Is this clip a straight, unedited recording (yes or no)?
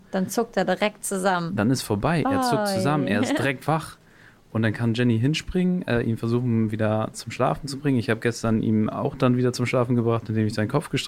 yes